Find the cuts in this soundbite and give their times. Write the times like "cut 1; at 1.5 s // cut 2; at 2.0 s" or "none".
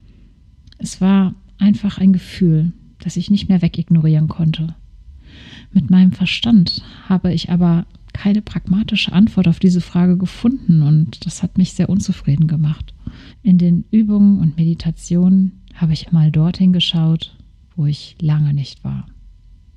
cut 1; at 13.3 s // cut 2; at 16.1 s